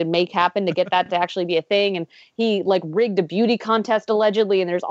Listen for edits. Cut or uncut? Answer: uncut